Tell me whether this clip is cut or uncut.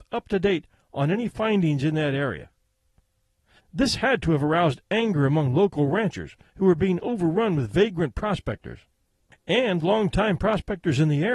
cut